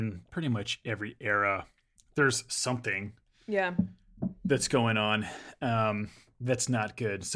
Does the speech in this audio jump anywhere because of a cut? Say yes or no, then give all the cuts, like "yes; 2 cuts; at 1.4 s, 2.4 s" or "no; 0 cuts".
no; 0 cuts